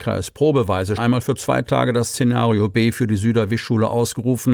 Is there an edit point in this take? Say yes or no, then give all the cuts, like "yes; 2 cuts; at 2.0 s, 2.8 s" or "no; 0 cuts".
yes; 1 cut; at 1.0 s